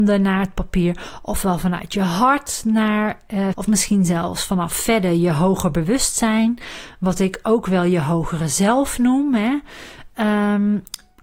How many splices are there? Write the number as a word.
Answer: one